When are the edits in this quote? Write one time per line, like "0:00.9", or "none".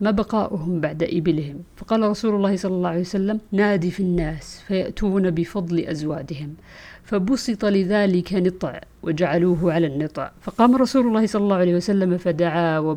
0:03.5